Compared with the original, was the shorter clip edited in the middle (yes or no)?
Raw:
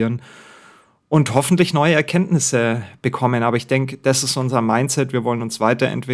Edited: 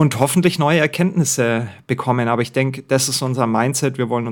no